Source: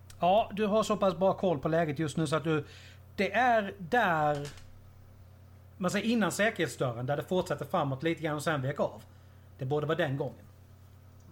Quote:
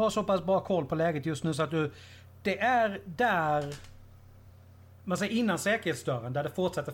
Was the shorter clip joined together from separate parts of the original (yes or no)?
no